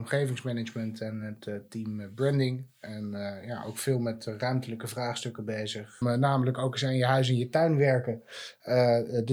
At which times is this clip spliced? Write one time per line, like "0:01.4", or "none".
0:06.0